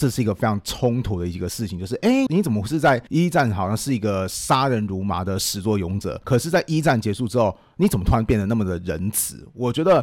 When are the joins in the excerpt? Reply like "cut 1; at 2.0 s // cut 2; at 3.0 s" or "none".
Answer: cut 1; at 2.3 s